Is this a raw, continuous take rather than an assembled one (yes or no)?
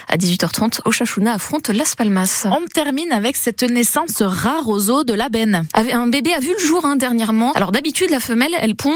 no